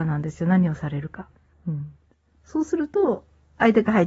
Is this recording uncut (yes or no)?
no